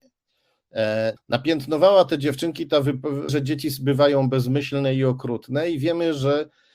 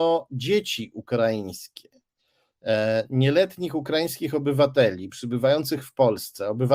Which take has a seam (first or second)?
first